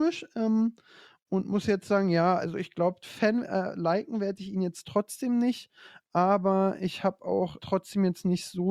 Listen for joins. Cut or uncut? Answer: cut